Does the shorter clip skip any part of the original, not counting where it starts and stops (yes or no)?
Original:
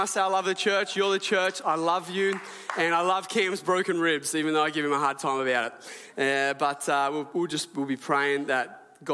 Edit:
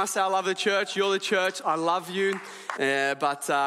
yes